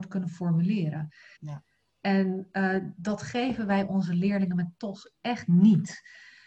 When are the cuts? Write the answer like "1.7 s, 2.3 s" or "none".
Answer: 1.4 s